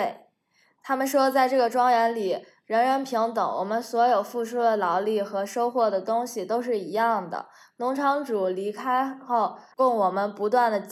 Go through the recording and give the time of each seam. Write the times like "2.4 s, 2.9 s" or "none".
9.7 s